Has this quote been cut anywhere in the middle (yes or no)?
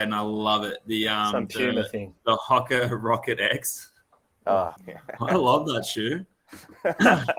yes